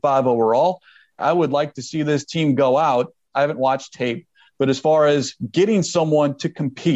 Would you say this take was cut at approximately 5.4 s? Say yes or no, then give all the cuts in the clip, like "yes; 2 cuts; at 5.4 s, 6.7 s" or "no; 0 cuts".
no; 2 cuts; at 1.2 s, 3.3 s